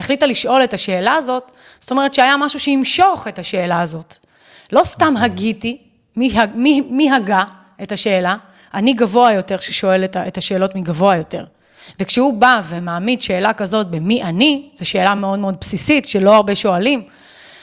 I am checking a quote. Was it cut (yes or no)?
no